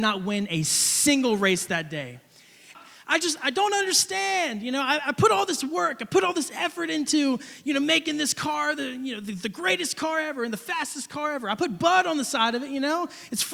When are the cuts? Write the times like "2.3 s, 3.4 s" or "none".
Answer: 2.7 s